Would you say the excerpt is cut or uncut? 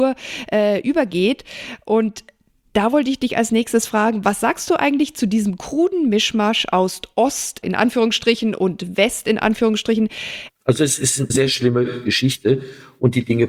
cut